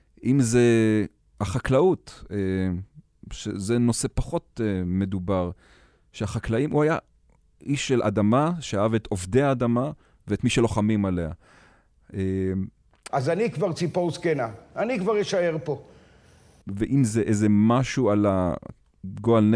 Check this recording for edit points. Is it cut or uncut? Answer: cut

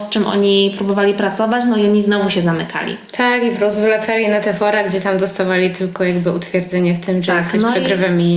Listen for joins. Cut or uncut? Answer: uncut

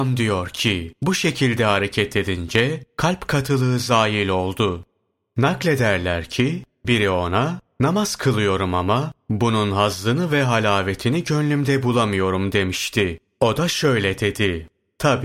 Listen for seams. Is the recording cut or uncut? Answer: uncut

